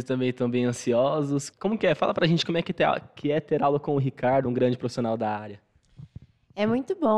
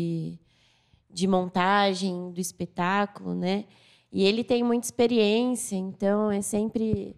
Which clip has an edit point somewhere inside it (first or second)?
first